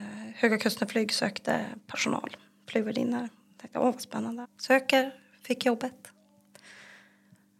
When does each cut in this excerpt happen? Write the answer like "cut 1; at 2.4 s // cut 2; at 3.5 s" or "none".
cut 1; at 4.4 s